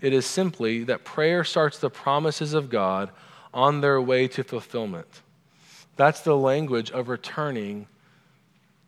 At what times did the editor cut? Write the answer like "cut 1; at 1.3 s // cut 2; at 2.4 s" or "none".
cut 1; at 5.8 s